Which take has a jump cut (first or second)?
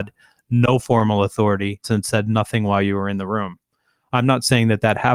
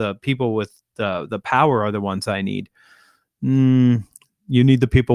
first